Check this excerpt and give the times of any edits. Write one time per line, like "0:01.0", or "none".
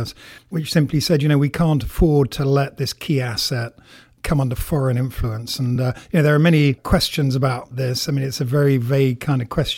none